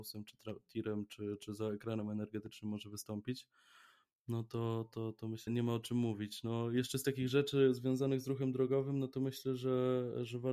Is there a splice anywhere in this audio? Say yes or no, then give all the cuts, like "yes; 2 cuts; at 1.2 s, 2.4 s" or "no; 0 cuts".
yes; 1 cut; at 5.5 s